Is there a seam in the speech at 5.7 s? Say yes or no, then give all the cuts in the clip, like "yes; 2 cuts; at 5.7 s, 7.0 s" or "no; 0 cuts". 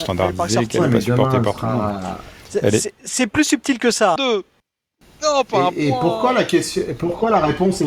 no; 1 cut; at 4.2 s